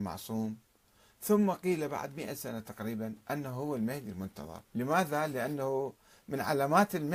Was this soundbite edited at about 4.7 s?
yes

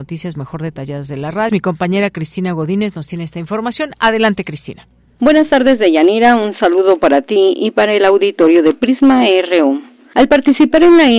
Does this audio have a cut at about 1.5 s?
yes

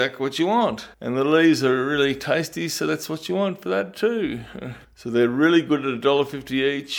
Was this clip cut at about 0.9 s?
yes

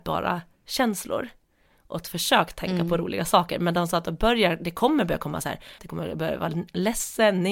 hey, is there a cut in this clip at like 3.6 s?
no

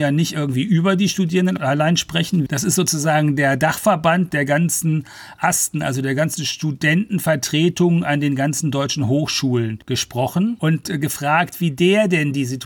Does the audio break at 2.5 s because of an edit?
yes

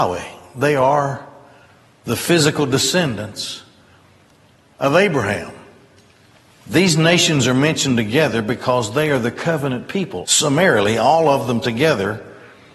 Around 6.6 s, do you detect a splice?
yes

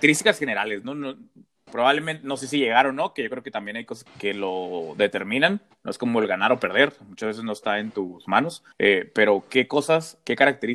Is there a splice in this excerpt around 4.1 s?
yes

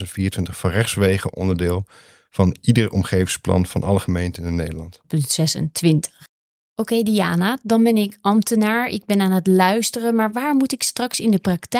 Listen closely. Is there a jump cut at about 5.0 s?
yes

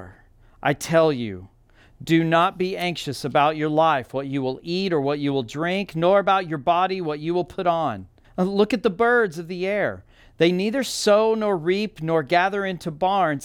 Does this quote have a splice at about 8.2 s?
yes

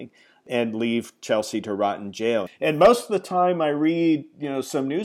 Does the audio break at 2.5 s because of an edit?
yes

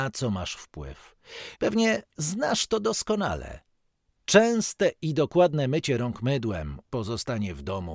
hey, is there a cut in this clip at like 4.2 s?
no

